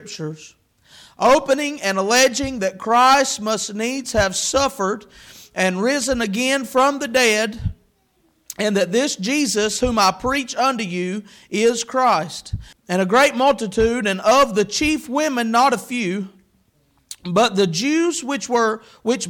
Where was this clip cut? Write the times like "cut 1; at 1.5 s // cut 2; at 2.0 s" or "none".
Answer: cut 1; at 12.7 s